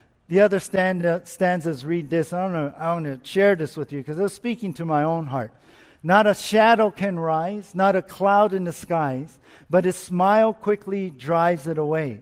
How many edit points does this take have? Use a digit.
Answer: 0